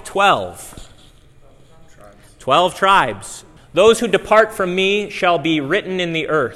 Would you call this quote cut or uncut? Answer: cut